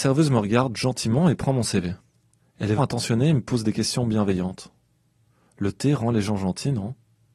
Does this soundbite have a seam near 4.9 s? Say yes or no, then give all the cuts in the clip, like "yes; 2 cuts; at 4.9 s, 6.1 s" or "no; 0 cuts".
no; 1 cut; at 2.8 s